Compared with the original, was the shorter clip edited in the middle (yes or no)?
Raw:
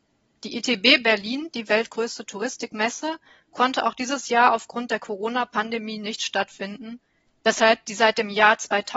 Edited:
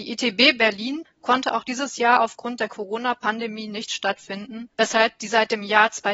yes